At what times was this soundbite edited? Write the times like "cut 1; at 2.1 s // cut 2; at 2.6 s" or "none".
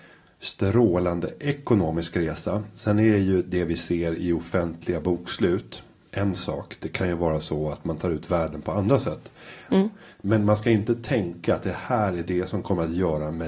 cut 1; at 9.7 s